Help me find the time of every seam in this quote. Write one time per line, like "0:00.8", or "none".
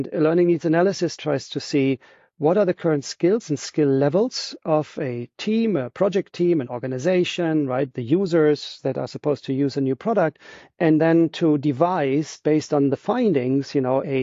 none